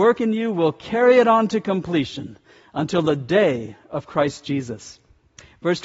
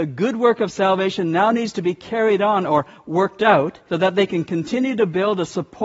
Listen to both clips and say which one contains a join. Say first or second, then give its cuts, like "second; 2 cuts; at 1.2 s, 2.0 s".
second; 1 cut; at 3.9 s